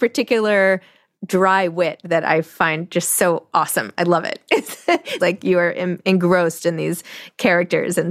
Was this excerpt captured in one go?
no; 1 cut; at 5.2 s

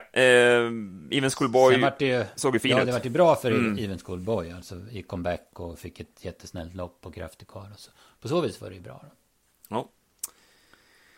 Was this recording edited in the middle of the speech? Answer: no; 0 cuts

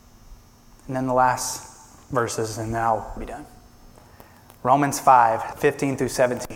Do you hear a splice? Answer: yes; 2 cuts; at 3.2 s, 5.5 s

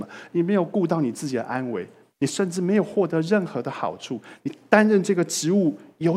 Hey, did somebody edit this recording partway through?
no; 0 cuts

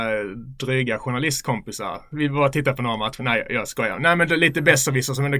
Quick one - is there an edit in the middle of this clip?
no; 0 cuts

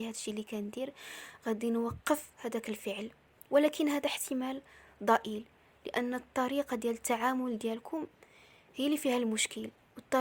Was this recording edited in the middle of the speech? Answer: no; 0 cuts

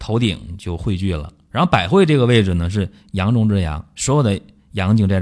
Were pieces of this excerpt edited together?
no; 0 cuts

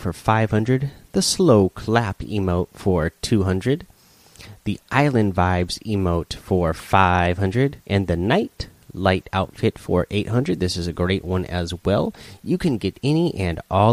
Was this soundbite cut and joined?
yes; 1 cut; at 7.8 s

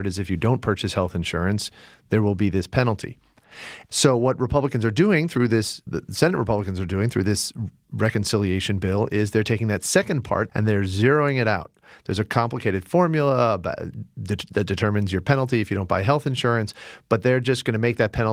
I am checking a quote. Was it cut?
yes; 3 cuts; at 3.9 s, 5.9 s, 10.5 s

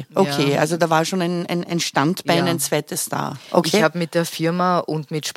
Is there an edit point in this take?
no; 0 cuts

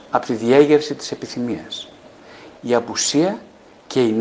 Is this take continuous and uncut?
no; 1 cut; at 2.6 s

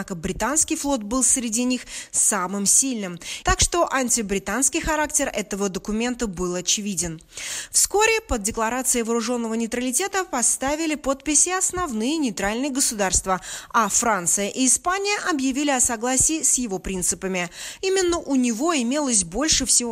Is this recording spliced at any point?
yes; 2 cuts; at 3.4 s, 17.8 s

